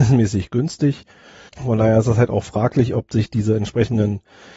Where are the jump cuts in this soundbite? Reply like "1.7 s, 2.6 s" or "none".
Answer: 1.5 s